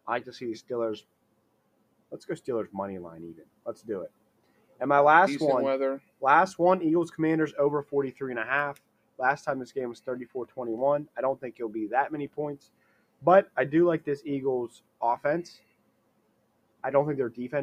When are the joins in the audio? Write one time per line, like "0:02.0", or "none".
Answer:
none